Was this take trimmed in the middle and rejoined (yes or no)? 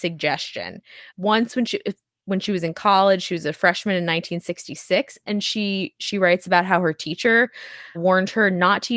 yes